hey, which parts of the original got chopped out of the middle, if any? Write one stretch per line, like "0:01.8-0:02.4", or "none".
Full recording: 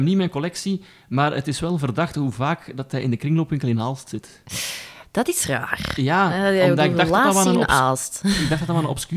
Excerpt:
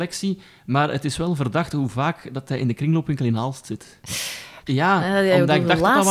0:05.1-0:06.0